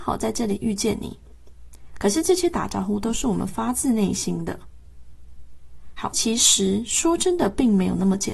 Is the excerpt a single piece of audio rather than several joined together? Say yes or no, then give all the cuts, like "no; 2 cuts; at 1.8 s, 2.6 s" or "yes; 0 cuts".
no; 1 cut; at 6.1 s